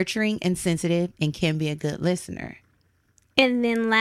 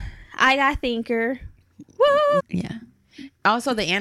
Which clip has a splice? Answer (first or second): second